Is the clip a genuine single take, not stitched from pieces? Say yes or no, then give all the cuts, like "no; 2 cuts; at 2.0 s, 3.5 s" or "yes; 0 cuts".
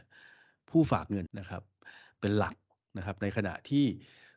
no; 1 cut; at 1.3 s